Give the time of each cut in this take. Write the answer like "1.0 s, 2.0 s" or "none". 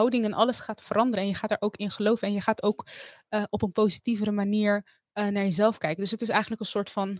none